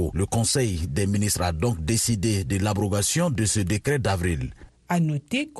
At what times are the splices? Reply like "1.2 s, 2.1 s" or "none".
4.7 s